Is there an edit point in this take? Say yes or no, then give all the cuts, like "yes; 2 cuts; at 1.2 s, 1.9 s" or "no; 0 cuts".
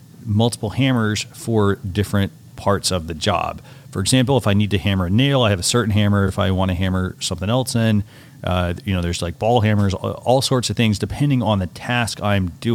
no; 0 cuts